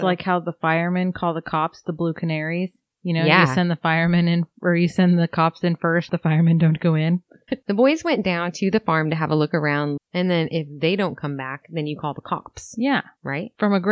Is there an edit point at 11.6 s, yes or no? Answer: no